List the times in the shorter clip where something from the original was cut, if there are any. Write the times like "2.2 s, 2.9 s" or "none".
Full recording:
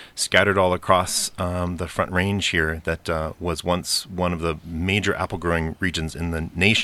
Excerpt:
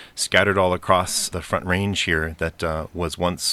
1.3 s